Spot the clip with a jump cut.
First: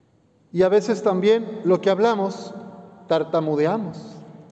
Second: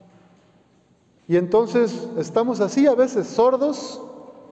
second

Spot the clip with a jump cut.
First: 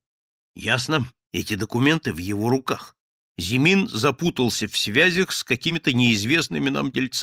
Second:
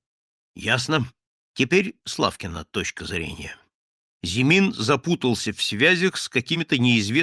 first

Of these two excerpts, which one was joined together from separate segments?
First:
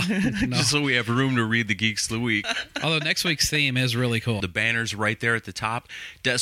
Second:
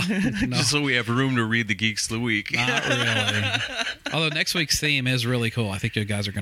first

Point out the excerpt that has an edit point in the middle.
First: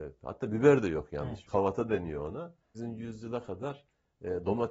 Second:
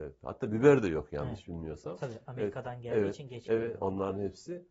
first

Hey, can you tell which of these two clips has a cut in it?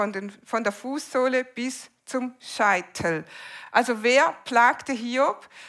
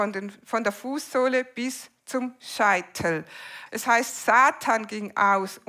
second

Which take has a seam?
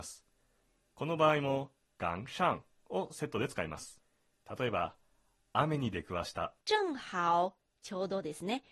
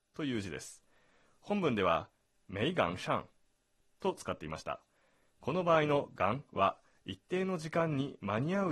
first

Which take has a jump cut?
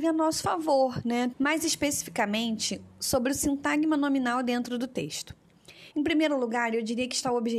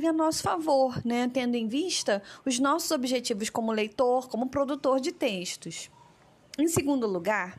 first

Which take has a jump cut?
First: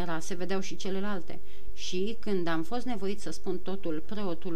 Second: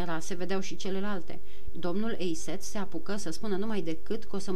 second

